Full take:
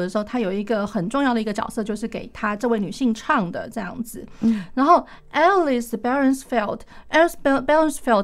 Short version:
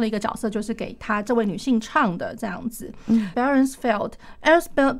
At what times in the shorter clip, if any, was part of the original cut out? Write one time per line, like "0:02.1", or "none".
0:03.3